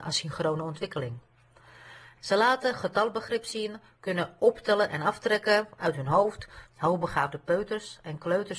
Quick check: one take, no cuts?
no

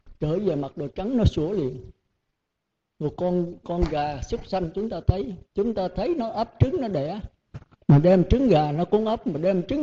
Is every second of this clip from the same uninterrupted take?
no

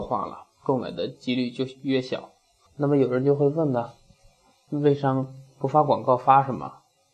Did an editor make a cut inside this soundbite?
yes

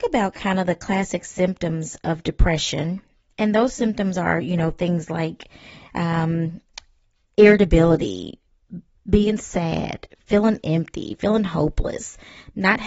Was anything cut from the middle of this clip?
no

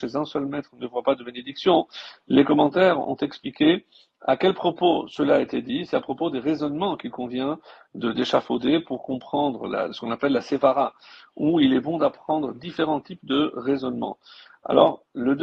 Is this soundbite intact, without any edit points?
yes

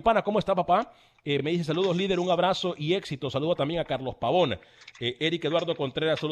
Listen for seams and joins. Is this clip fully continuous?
yes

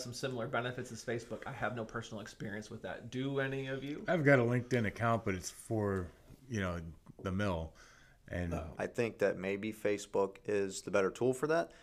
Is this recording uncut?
no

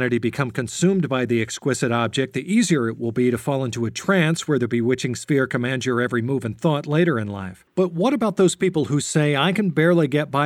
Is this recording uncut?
no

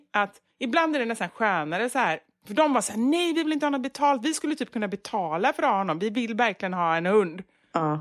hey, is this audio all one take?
yes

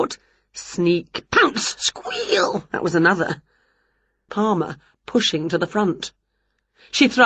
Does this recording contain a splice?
yes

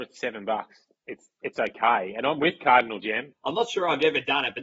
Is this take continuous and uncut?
no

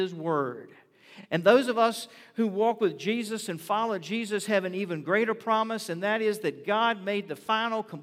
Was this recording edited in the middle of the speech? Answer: no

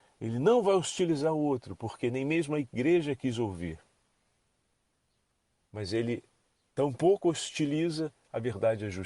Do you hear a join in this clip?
no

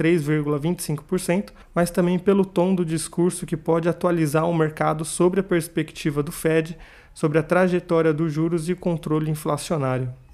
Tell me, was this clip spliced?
yes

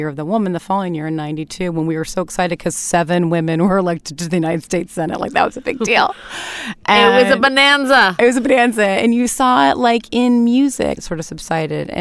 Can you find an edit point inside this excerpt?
yes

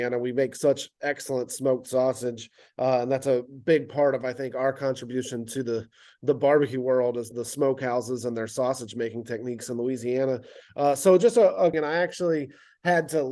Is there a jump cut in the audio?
yes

